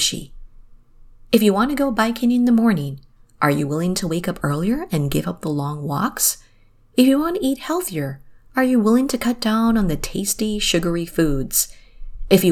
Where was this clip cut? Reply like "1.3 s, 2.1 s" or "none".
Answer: none